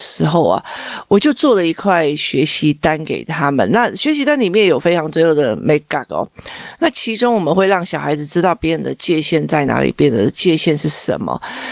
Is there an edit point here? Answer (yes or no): no